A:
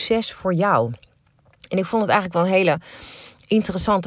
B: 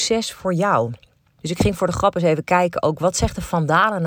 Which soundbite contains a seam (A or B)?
B